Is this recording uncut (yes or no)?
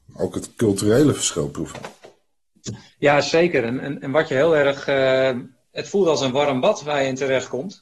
yes